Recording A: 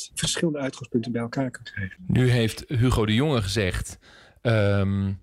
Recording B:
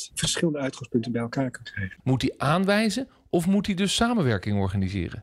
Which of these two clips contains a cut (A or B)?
B